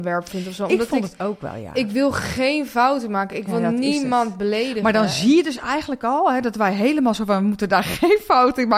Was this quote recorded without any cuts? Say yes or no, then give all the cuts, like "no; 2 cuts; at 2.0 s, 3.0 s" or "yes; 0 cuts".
yes; 0 cuts